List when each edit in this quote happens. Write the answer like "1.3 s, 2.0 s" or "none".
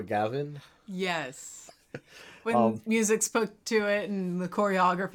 1.7 s